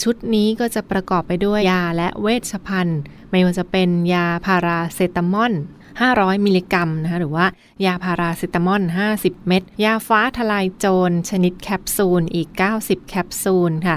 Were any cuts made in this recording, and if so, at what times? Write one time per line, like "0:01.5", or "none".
0:01.6
0:09.7